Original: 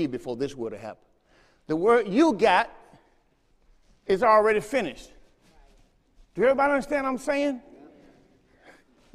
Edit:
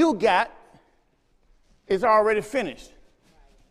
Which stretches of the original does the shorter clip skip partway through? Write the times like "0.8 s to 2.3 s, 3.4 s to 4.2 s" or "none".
none